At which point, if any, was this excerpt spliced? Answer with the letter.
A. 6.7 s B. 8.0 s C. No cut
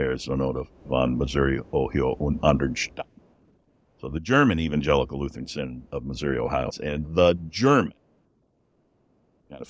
A